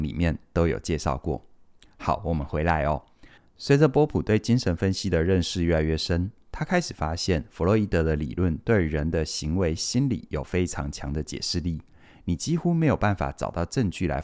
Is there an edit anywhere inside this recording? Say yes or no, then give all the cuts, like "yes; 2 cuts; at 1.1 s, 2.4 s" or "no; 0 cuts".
no; 0 cuts